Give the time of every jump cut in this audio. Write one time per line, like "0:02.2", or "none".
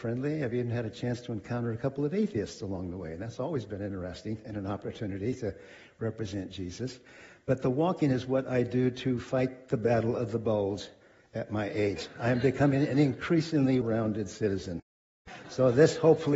0:13.8

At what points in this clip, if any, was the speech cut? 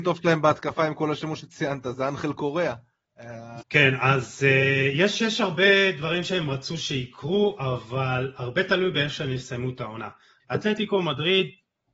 0:03.6
0:10.4

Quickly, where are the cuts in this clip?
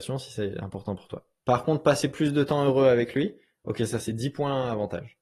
0:01.4

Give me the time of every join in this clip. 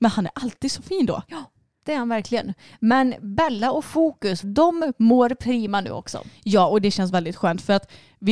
0:04.4

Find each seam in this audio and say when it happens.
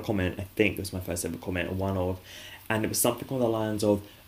none

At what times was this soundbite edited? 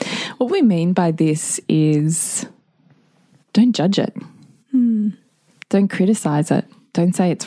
none

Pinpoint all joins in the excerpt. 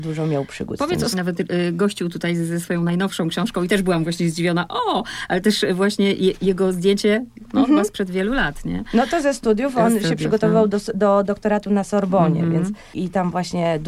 0:01.1

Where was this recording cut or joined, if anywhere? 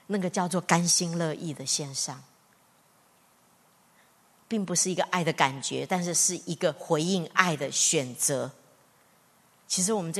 none

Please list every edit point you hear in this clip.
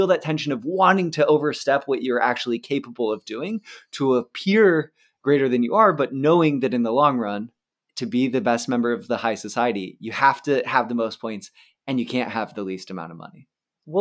none

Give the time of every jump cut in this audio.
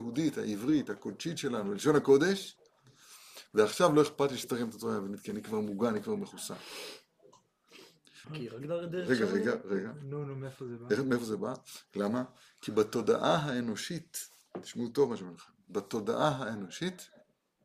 0:08.2
0:11.9

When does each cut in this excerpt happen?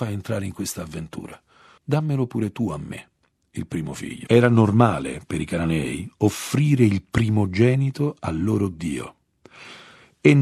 0:04.3

